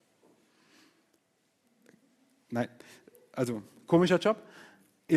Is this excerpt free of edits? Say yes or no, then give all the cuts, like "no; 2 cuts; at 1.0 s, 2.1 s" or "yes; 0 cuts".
yes; 0 cuts